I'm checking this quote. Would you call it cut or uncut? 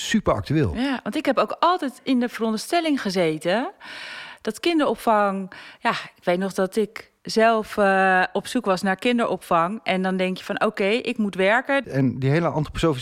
cut